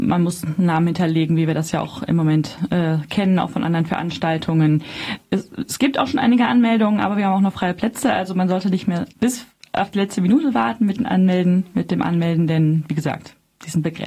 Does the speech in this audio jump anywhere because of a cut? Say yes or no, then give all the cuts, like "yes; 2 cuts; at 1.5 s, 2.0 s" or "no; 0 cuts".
yes; 1 cut; at 9.1 s